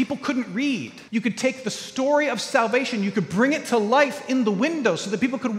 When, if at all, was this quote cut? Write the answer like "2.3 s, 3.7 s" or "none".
1.1 s